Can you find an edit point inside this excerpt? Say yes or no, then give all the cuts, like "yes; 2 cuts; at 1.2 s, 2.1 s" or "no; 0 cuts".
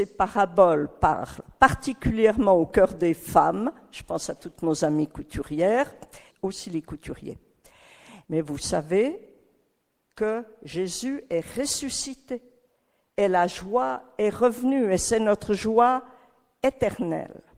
yes; 2 cuts; at 6.3 s, 8.2 s